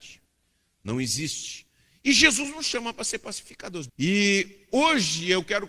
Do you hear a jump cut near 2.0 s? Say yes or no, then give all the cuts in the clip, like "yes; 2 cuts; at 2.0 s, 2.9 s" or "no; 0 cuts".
no; 1 cut; at 3.9 s